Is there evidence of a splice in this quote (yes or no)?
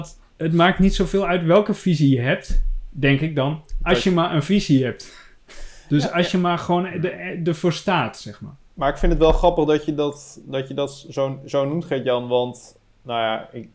no